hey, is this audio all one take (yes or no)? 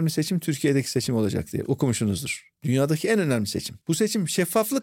no